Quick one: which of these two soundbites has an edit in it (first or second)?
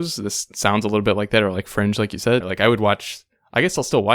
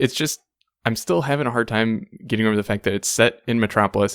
first